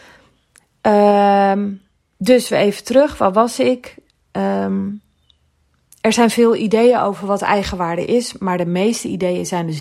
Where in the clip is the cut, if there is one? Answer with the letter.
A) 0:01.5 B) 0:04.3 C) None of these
C